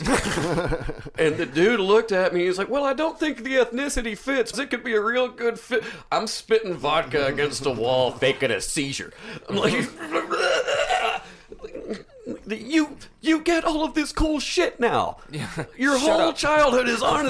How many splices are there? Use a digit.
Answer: 1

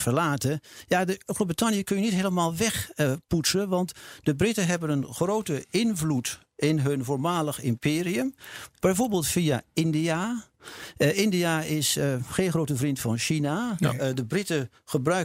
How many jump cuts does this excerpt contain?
0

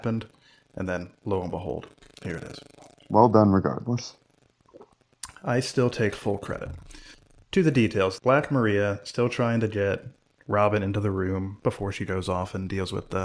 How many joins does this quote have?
1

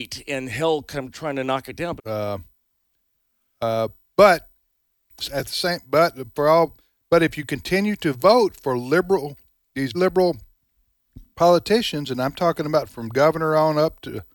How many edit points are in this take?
2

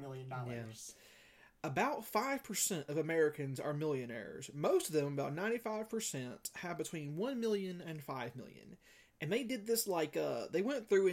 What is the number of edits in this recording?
1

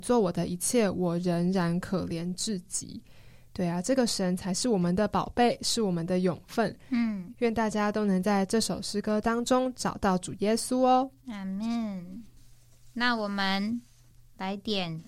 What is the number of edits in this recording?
0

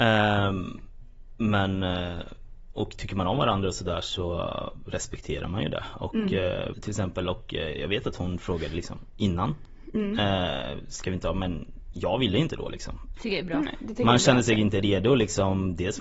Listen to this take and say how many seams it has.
2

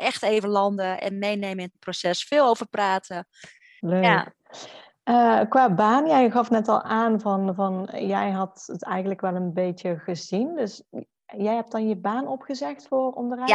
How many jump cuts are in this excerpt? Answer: 1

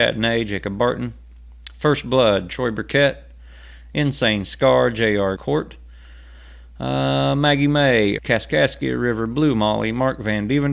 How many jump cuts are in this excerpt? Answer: 2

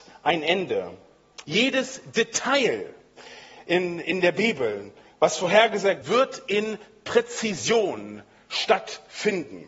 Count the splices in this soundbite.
2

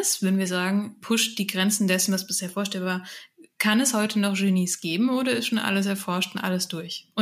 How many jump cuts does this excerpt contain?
1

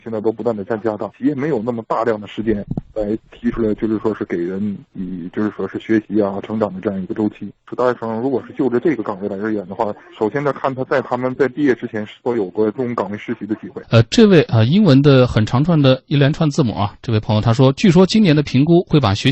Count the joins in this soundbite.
1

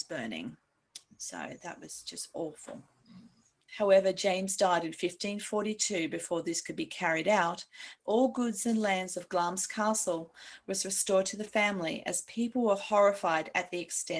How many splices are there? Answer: 2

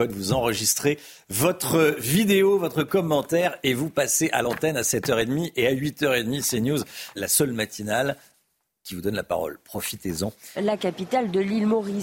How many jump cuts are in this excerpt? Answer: 2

